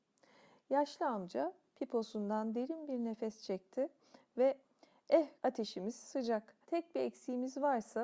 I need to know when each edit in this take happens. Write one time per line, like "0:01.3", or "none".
0:05.4
0:06.6